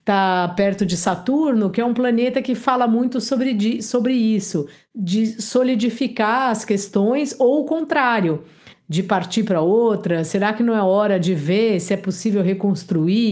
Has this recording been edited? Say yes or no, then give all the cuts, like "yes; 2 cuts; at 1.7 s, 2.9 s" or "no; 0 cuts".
yes; 1 cut; at 8.7 s